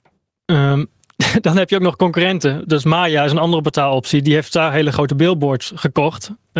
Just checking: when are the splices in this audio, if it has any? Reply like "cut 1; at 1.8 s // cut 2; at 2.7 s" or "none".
none